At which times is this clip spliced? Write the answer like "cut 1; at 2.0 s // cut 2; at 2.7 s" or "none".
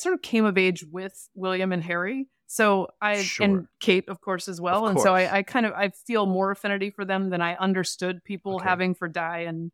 none